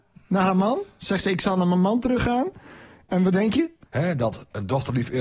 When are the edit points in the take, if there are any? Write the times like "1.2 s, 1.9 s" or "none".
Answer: 3.8 s